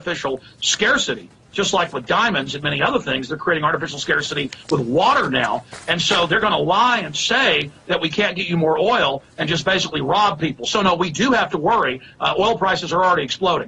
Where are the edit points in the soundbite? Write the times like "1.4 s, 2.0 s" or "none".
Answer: none